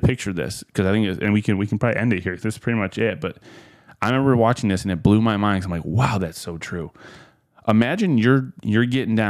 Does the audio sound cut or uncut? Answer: uncut